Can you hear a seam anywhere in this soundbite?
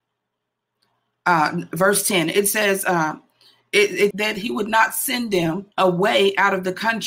yes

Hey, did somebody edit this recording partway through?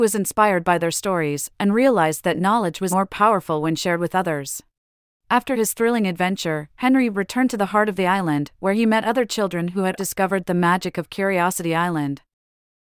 yes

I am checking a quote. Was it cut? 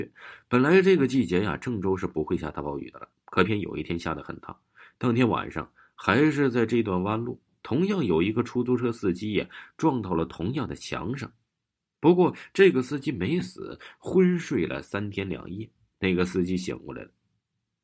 yes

